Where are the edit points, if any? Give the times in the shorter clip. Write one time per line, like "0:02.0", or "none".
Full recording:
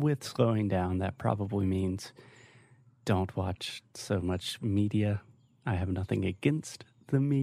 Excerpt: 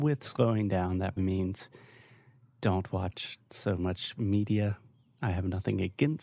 0:01.2